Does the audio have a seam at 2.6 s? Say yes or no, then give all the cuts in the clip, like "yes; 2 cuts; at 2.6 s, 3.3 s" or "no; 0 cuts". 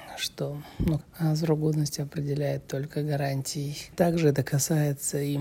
no; 2 cuts; at 1.0 s, 3.9 s